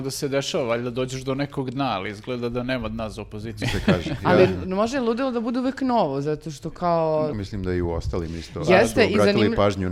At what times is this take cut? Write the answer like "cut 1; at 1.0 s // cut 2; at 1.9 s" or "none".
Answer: cut 1; at 3.6 s // cut 2; at 7.3 s